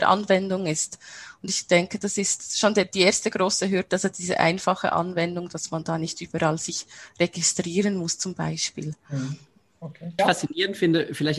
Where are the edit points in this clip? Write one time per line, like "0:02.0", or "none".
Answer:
0:10.2